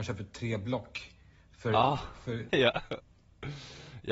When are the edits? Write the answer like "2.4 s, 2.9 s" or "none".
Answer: 2.5 s